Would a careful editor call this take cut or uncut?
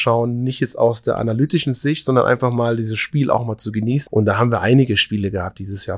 cut